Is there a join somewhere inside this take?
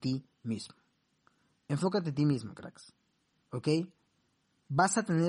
no; 0 cuts

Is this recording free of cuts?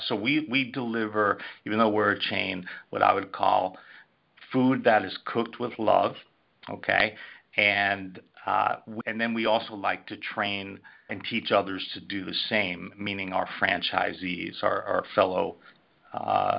no; 2 cuts; at 9.0 s, 11.1 s

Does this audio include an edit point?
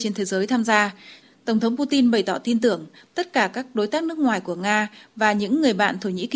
no; 0 cuts

